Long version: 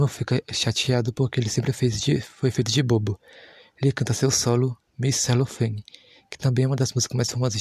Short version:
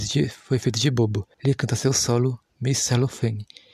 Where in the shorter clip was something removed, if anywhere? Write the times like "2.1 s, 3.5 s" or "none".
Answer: 1.3 s